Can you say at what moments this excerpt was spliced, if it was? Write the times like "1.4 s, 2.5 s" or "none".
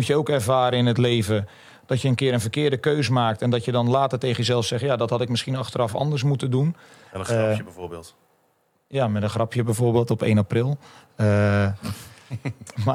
none